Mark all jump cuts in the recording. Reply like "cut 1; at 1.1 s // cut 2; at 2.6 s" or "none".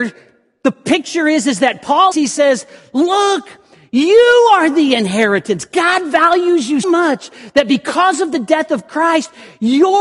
cut 1; at 2.1 s // cut 2; at 6.8 s

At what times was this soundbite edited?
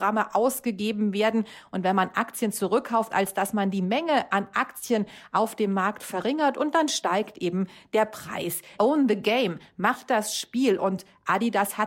cut 1; at 3.1 s // cut 2; at 8.8 s

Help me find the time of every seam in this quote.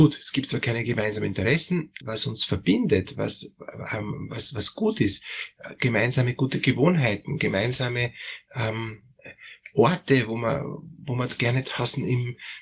cut 1; at 2.0 s

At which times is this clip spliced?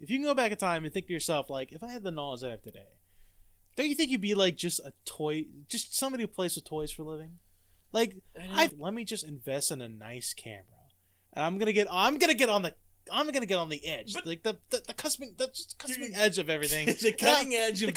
cut 1; at 8.7 s

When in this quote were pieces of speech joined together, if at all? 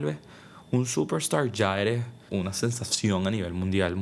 cut 1; at 2.3 s

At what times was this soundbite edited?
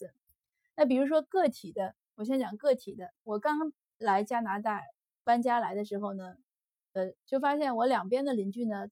cut 1; at 7.2 s

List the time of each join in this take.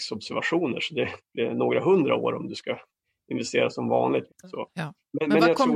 cut 1; at 1.2 s // cut 2; at 4.3 s

